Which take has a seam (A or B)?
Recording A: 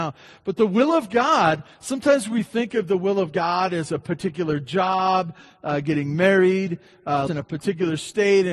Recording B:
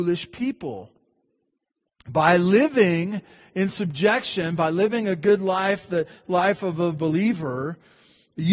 A